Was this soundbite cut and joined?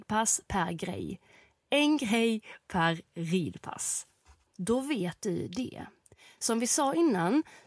yes; 1 cut; at 4.5 s

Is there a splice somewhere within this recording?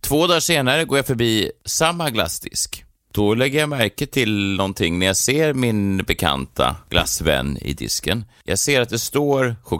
no; 0 cuts

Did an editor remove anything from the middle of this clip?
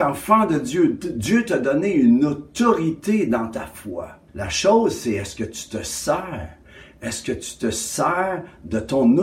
yes; 1 cut; at 4.3 s

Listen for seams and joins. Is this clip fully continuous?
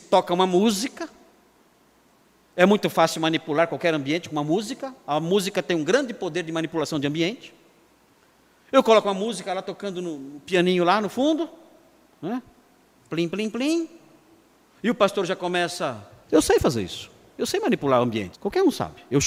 no; 3 cuts; at 14.7 s, 16.2 s, 18.3 s

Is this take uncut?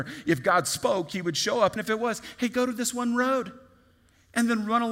no; 1 cut; at 1.8 s

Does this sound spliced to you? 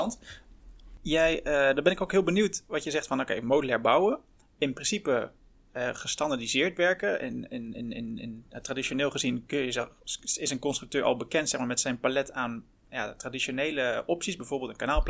no; 0 cuts

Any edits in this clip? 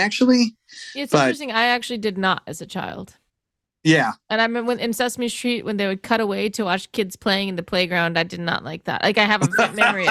no; 0 cuts

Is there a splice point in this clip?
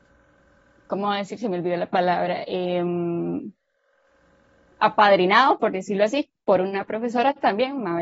no; 0 cuts

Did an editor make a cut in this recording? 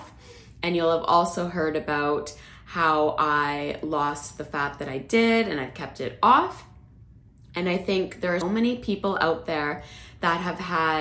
yes; 1 cut; at 8.4 s

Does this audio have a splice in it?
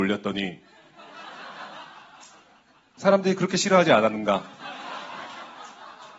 no; 0 cuts

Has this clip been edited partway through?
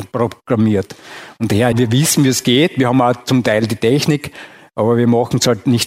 yes; 1 cut; at 1.7 s

